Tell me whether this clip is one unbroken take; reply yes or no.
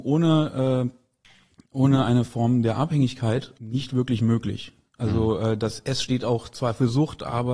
yes